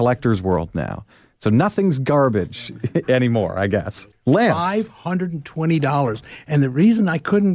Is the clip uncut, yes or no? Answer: no